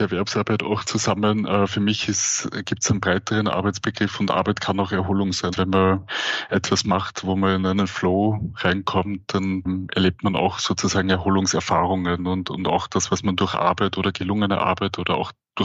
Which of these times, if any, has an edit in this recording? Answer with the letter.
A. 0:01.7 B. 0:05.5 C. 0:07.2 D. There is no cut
B